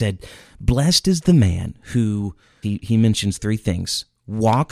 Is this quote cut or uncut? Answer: cut